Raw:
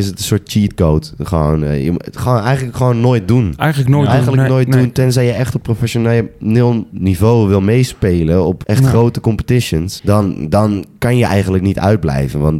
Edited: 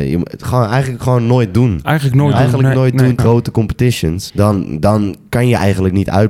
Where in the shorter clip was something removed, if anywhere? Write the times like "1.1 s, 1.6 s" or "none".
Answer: 3.2 s